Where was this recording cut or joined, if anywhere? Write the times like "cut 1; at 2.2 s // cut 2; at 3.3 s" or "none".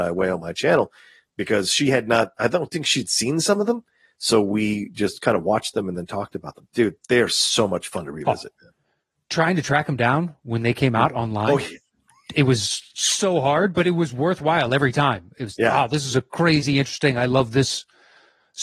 none